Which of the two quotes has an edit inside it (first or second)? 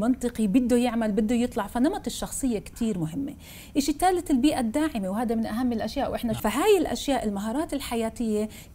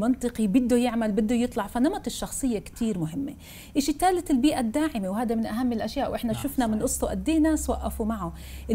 first